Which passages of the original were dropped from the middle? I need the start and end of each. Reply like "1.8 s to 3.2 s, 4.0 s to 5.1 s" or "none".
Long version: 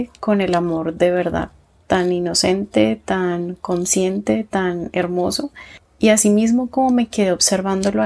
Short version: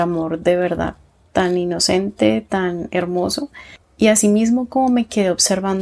3.0 s to 4.5 s